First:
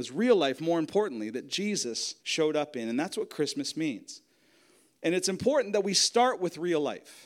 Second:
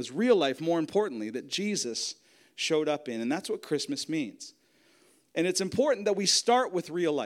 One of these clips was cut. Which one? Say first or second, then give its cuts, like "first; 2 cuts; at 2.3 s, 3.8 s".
first; 1 cut; at 2.2 s